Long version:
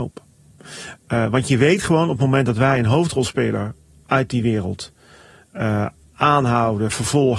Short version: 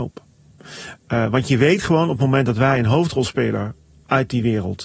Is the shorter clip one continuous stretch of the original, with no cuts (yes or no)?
yes